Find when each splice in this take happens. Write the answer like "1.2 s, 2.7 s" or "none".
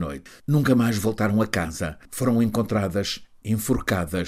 none